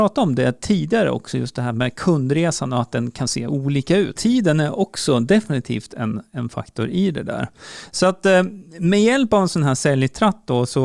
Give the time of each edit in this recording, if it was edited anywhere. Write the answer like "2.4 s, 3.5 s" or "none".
4.2 s